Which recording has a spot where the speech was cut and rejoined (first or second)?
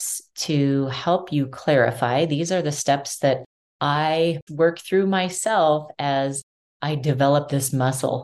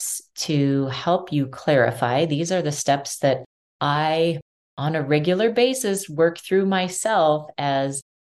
first